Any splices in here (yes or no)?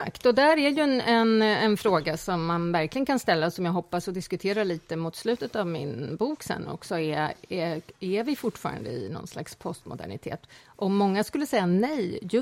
no